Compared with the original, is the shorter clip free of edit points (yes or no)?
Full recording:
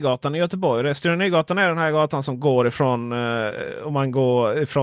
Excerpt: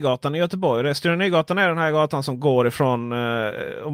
yes